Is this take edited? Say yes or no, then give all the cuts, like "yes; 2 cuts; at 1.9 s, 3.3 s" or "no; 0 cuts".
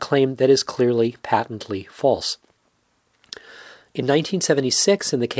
no; 0 cuts